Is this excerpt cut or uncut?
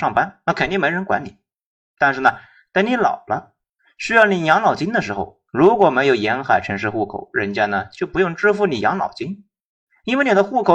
uncut